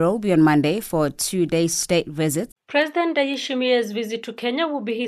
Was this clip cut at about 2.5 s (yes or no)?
yes